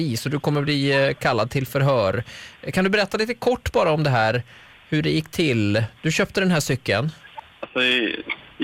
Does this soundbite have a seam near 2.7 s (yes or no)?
no